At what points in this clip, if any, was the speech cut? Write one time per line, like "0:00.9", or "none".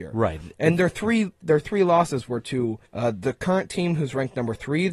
0:02.9